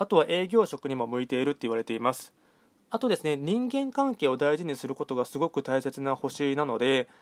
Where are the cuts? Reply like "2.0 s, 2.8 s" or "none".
none